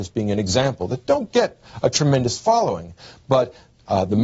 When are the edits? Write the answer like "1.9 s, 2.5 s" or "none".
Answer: none